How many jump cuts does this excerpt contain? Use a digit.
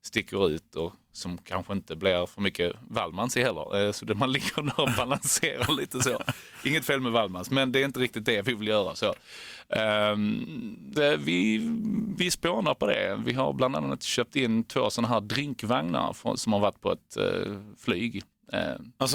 1